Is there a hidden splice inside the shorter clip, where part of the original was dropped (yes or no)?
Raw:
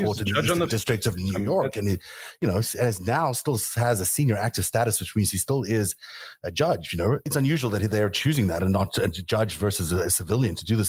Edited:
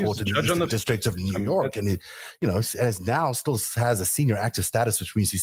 no